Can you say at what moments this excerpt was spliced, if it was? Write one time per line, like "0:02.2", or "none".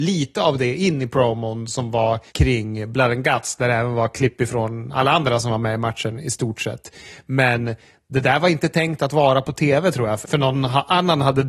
0:02.3
0:10.2